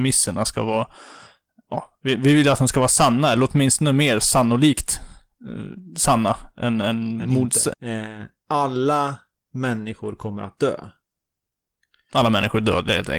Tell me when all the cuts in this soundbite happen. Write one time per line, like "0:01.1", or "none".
0:07.7